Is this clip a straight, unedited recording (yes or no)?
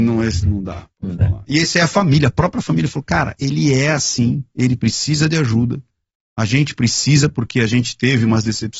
yes